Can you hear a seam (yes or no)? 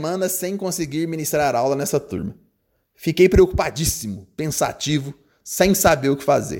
no